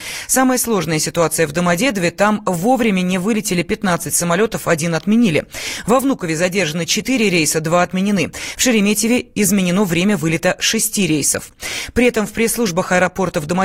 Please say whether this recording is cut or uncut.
uncut